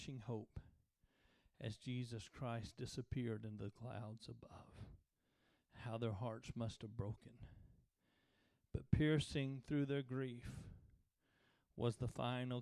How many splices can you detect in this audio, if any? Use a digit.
0